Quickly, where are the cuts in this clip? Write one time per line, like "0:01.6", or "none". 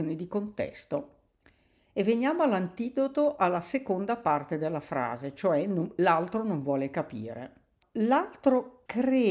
none